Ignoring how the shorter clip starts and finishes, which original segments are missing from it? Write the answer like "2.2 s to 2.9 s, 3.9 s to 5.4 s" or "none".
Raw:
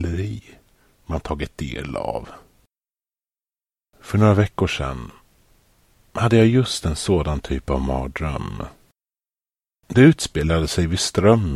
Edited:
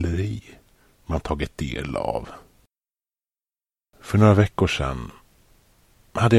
none